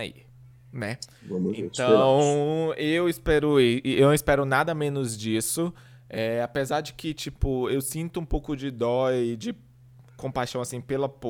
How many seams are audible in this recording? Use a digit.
0